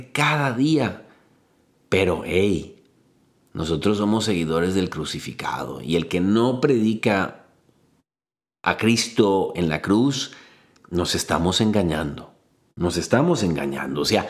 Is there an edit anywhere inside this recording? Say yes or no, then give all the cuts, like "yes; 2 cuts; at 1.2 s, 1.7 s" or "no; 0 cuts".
no; 0 cuts